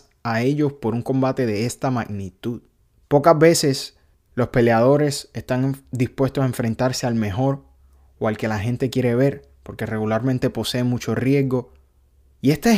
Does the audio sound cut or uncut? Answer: uncut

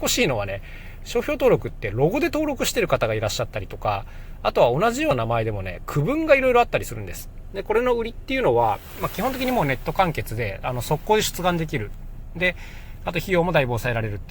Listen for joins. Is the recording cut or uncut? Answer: cut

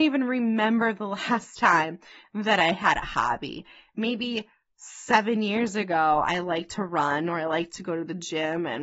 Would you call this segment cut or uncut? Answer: uncut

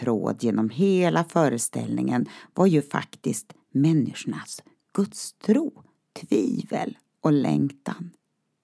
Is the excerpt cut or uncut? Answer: uncut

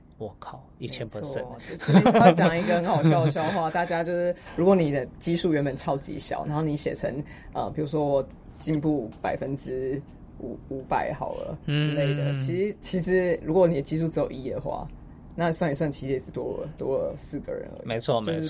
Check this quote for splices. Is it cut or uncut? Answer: uncut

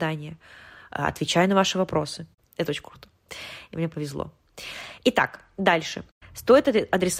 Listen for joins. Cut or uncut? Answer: cut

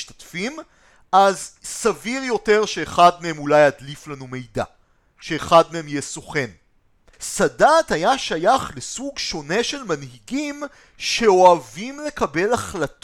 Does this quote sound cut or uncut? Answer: cut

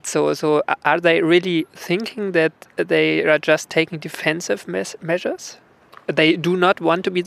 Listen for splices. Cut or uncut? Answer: uncut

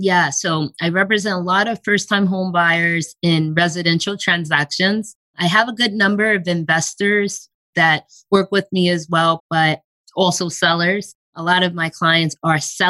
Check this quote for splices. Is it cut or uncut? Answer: cut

